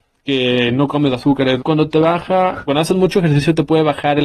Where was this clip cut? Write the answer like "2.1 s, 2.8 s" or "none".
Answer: 1.6 s, 2.7 s

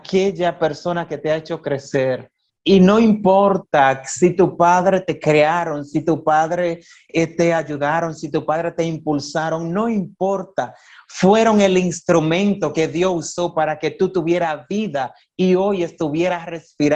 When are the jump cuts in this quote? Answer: 2.5 s

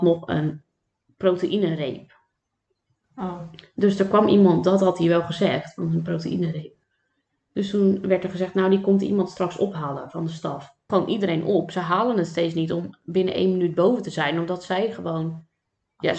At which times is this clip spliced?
10.9 s

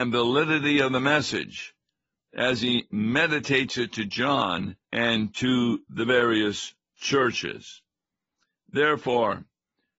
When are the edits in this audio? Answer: 4.8 s

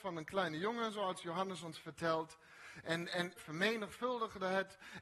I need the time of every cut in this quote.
3.4 s

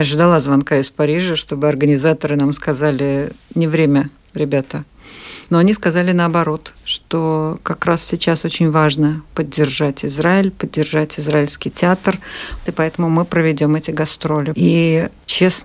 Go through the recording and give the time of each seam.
12.7 s, 14.5 s

